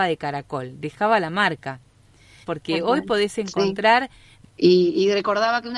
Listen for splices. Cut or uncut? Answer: cut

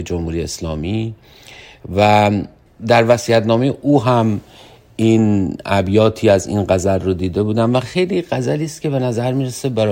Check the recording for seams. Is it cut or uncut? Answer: uncut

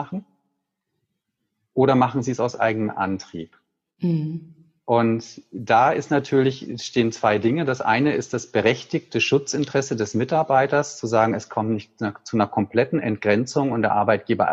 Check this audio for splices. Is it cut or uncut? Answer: uncut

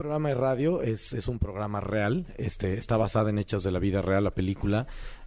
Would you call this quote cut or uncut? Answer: uncut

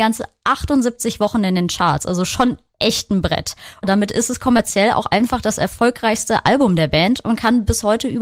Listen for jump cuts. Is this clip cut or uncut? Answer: uncut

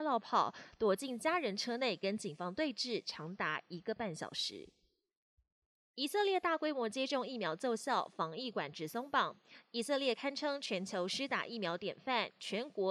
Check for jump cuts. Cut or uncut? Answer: uncut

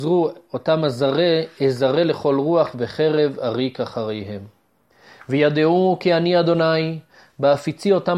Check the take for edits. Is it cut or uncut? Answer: uncut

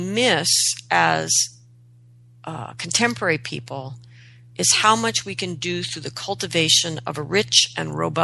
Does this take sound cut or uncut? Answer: uncut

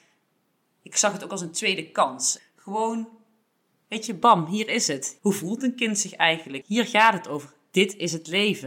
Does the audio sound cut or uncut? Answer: cut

